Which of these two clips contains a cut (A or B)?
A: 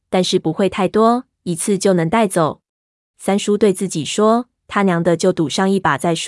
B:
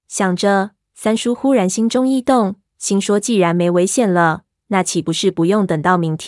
A